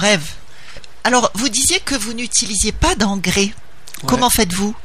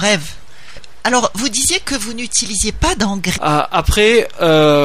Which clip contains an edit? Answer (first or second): second